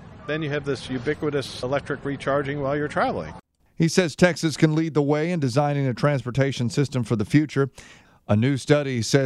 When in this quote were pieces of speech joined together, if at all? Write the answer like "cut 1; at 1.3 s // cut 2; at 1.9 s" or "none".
none